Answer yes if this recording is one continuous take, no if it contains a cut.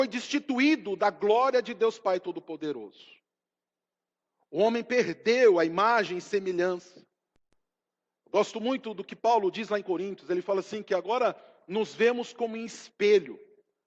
yes